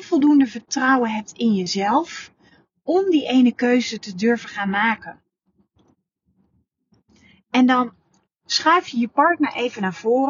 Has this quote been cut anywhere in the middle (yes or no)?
no